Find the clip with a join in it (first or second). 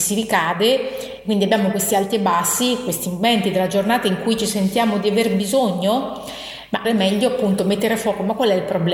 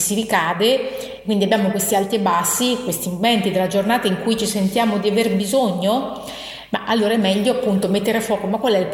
first